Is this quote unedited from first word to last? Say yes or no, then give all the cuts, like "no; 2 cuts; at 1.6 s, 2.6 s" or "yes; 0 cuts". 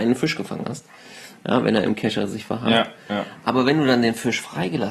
yes; 0 cuts